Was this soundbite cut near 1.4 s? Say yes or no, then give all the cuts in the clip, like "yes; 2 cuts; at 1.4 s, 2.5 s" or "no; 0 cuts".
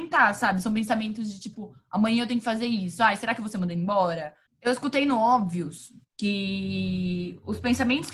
no; 2 cuts; at 4.5 s, 6.0 s